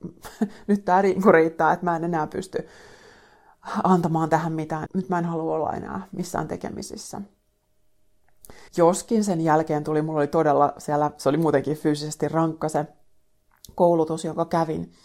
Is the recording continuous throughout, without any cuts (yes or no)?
no